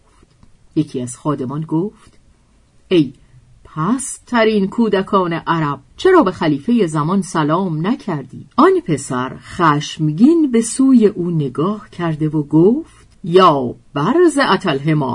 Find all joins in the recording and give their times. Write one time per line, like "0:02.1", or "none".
0:05.9
0:08.5
0:13.1

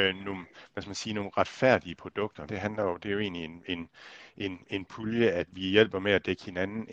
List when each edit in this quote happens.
0:02.5

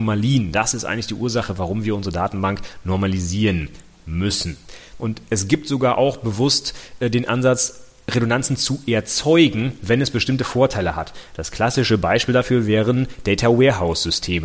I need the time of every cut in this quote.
0:05.0

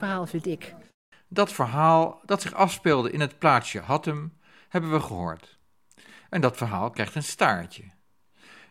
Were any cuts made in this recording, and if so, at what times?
none

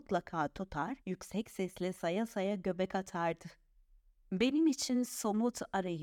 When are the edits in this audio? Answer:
0:01.0

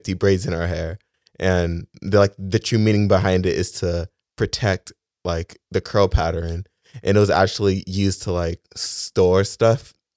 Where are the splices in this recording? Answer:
none

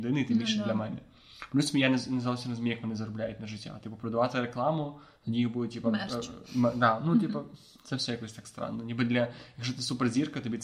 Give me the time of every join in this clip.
none

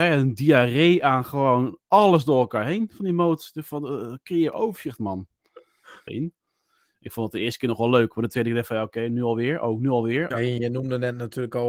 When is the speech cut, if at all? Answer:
0:06.1
0:10.3

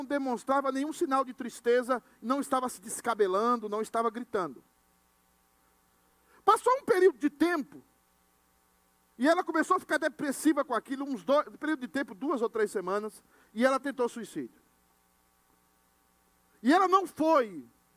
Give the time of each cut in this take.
none

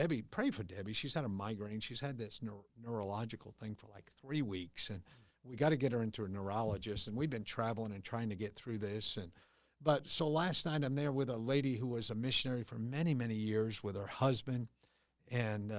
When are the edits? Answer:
none

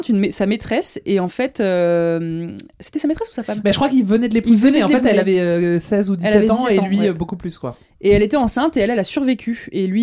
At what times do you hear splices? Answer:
none

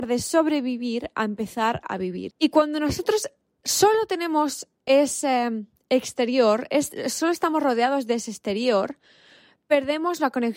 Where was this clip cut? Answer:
0:02.3

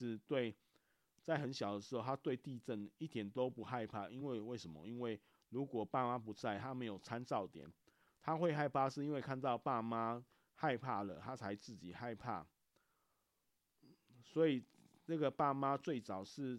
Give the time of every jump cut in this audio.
none

